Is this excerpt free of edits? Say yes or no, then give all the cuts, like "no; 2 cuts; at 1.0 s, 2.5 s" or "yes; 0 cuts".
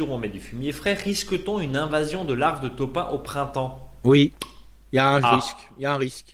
yes; 0 cuts